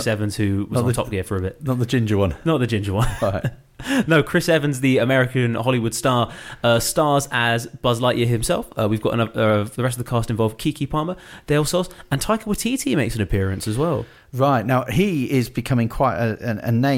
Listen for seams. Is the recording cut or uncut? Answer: uncut